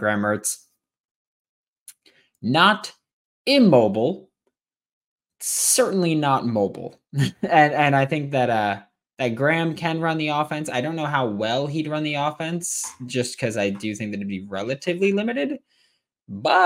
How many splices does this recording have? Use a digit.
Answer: 0